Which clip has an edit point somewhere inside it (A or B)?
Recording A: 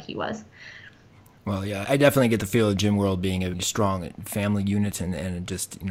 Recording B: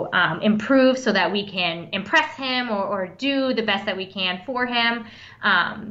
A